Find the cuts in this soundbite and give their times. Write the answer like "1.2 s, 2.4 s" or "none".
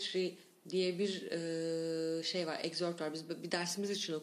none

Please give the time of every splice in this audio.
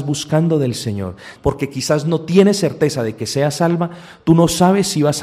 1.4 s

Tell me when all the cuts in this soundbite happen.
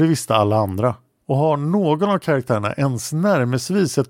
1.2 s

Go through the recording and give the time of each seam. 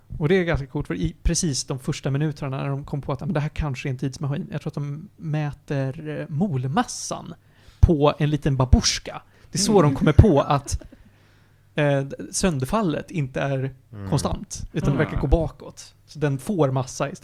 none

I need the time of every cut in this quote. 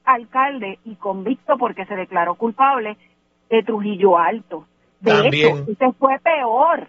none

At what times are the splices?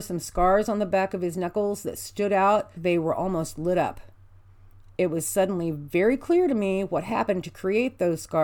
2.8 s

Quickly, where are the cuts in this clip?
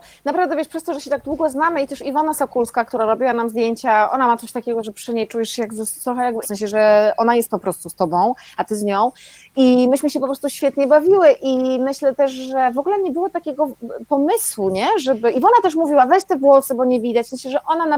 6.4 s

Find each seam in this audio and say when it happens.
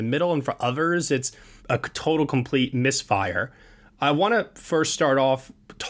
1.6 s

